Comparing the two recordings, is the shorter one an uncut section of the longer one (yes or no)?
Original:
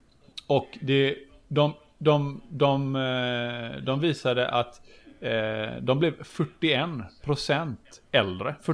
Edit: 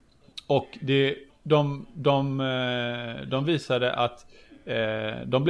no